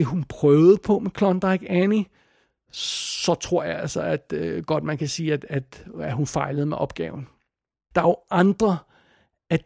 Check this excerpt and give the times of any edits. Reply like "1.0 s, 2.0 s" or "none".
7.9 s